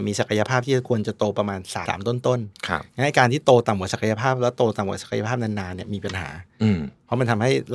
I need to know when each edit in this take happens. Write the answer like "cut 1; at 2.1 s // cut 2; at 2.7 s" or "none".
cut 1; at 1.9 s